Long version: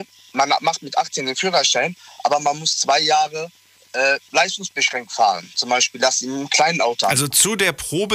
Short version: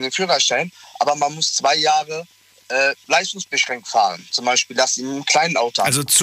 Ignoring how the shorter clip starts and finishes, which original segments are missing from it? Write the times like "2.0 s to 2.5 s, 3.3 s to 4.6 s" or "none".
none